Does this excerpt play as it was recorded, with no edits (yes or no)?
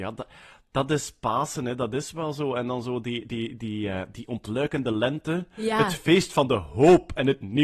yes